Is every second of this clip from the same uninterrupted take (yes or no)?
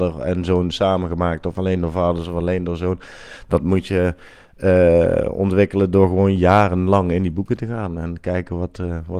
yes